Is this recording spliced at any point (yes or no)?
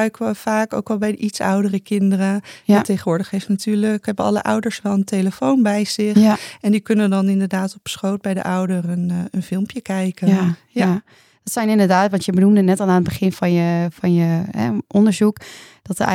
no